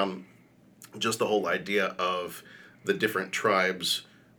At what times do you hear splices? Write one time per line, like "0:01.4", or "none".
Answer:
none